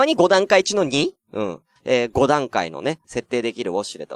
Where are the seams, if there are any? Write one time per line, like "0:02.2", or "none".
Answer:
0:01.8
0:03.0

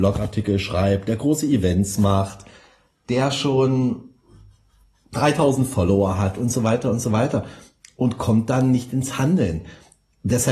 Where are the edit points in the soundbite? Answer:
none

